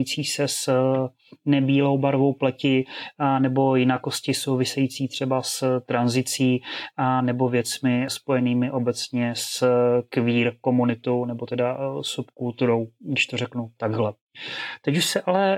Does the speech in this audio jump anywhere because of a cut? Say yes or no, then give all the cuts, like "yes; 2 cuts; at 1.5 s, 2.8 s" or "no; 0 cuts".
no; 0 cuts